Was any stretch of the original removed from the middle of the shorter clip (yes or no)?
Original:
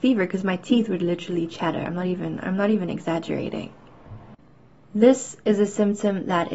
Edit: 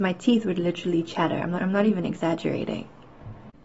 yes